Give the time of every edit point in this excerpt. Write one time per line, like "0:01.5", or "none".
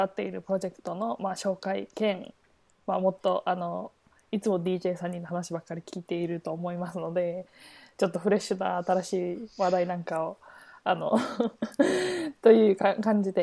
none